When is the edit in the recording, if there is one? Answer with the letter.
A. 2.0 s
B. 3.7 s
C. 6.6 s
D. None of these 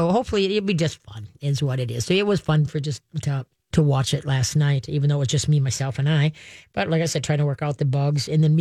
B